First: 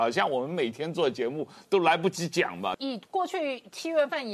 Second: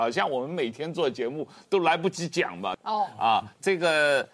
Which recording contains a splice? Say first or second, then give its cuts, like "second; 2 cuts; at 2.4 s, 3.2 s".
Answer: second; 1 cut; at 2.8 s